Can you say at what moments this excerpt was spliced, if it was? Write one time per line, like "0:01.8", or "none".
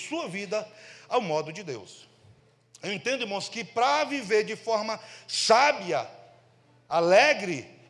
none

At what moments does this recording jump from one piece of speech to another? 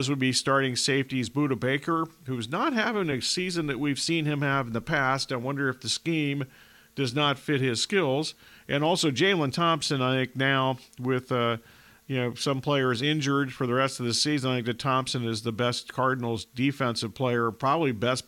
none

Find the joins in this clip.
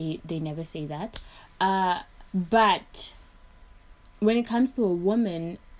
0:02.3

